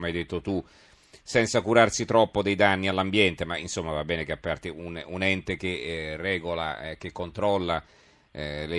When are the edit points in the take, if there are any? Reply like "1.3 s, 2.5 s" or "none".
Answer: none